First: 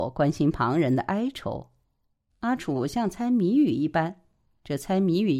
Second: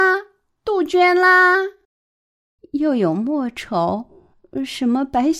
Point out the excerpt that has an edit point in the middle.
first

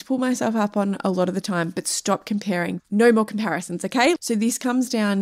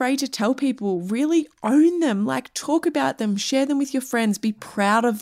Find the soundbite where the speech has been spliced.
first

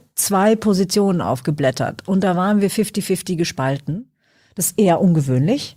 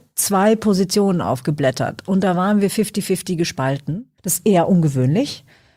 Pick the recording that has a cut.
second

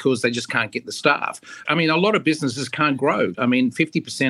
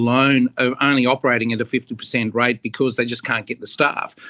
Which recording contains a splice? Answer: first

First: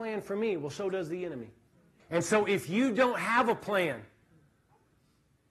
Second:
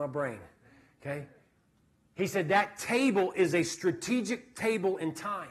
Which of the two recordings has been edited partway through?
first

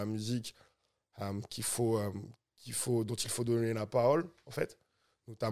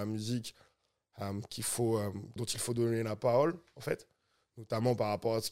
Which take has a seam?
second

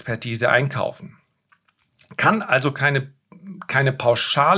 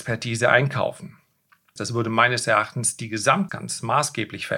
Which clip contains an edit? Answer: second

